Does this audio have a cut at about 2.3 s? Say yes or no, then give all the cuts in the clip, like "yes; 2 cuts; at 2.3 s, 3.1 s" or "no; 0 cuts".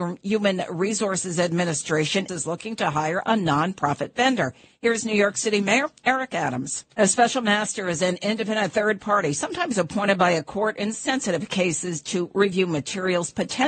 yes; 2 cuts; at 2.3 s, 7.0 s